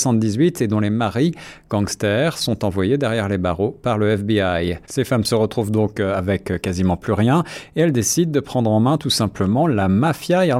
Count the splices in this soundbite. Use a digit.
1